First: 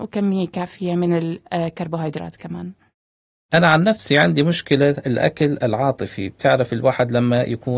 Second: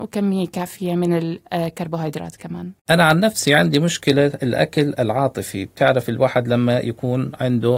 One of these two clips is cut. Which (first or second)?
second